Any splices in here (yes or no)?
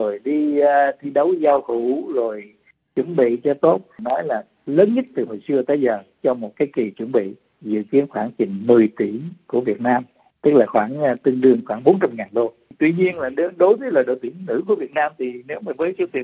no